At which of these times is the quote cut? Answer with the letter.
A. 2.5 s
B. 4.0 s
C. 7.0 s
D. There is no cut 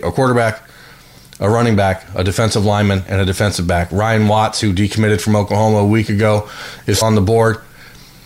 C